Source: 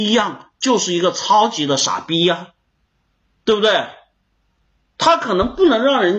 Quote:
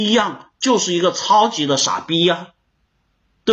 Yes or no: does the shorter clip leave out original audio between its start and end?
no